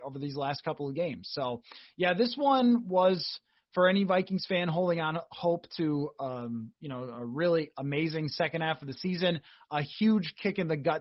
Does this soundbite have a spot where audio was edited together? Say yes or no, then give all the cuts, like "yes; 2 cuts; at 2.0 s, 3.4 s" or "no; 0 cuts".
no; 0 cuts